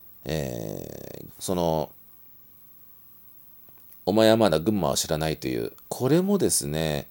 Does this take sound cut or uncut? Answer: cut